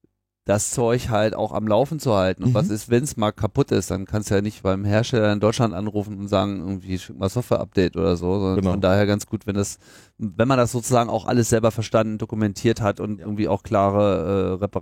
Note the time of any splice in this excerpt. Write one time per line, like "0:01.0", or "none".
none